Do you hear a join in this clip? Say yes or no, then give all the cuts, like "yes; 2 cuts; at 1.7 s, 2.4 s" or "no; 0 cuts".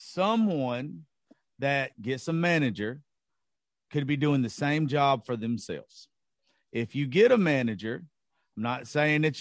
no; 0 cuts